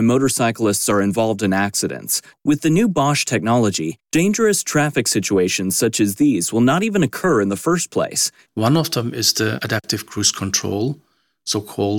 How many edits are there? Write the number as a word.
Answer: two